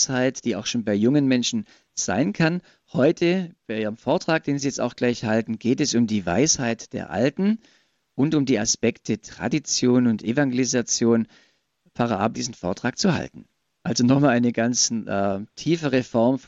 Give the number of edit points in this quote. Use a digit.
2